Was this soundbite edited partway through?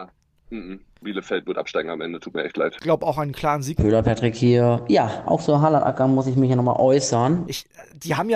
yes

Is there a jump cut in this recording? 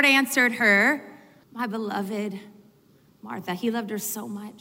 yes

